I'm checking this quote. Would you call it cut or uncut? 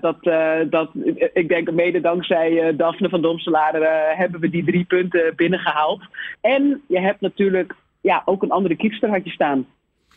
cut